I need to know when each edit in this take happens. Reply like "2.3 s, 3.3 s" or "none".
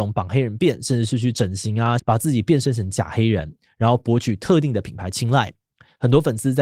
2.0 s